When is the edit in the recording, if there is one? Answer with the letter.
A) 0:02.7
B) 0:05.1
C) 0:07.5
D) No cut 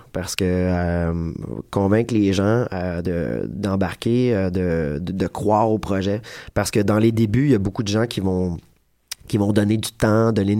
D